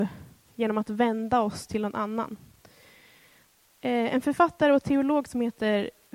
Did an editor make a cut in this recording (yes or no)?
no